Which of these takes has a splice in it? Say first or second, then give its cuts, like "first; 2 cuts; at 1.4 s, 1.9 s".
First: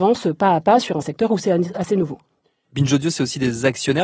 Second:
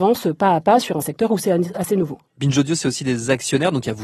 second; 1 cut; at 2.3 s